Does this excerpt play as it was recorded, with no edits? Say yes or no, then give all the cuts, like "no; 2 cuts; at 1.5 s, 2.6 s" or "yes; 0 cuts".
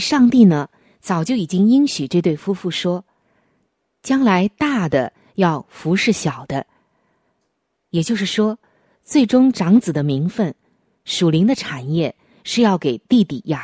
yes; 0 cuts